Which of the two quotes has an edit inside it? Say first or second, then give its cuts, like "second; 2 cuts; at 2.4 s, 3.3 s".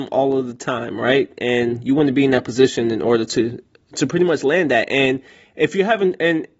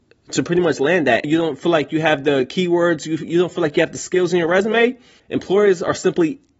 second; 2 cuts; at 1.2 s, 5.2 s